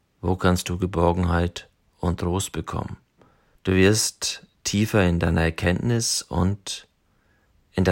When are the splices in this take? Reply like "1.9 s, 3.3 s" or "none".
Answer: 3.5 s